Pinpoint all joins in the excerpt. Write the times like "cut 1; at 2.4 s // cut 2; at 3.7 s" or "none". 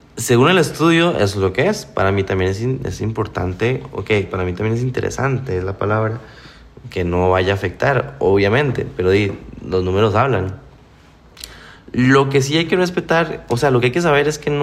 none